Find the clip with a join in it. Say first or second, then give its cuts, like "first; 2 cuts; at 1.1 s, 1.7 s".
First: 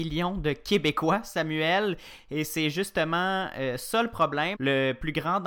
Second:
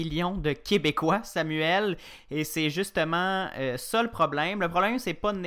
first; 1 cut; at 4.5 s